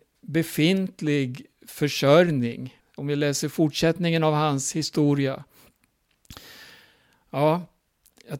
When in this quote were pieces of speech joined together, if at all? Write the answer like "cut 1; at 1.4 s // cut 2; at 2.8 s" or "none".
cut 1; at 2.8 s